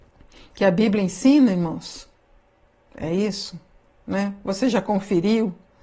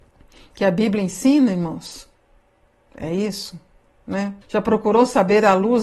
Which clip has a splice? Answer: second; 1 cut; at 4.4 s

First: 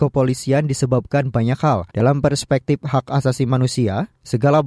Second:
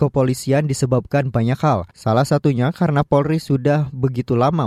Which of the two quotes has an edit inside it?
first; 1 cut; at 1.9 s

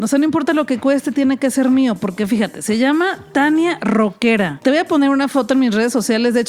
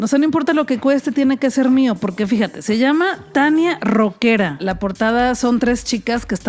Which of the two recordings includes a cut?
second; 1 cut; at 4.6 s

